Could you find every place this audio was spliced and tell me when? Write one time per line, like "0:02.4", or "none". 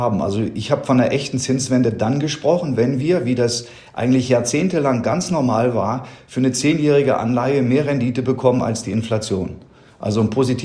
none